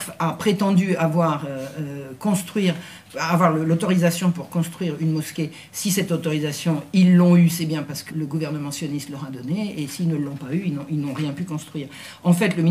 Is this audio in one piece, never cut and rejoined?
no; 1 cut; at 8.1 s

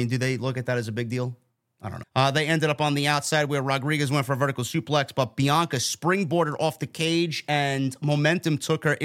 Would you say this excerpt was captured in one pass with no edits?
no; 1 cut; at 2.0 s

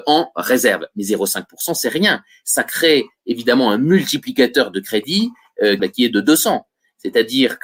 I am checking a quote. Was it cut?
yes; 1 cut; at 5.8 s

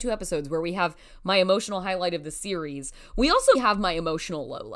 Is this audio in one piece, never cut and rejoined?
no; 1 cut; at 3.5 s

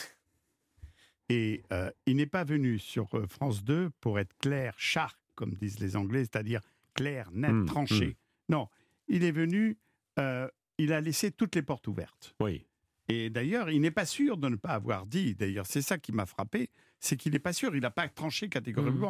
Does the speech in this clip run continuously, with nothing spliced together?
yes; 0 cuts

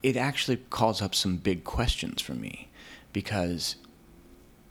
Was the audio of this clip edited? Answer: no; 0 cuts

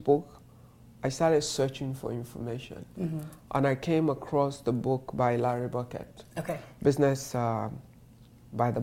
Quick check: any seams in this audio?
no; 0 cuts

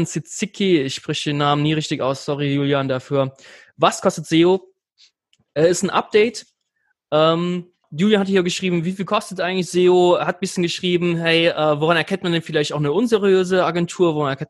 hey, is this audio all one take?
no; 1 cut; at 7.8 s

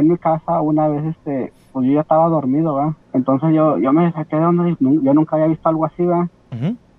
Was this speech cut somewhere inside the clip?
yes; 2 cuts; at 3.0 s, 4.8 s

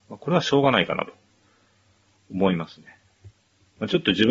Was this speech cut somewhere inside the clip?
no; 0 cuts

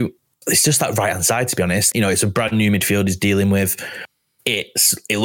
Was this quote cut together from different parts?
yes; 1 cut; at 1.9 s

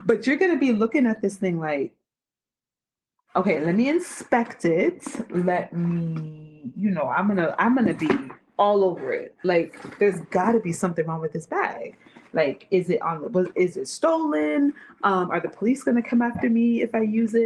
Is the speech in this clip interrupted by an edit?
no; 0 cuts

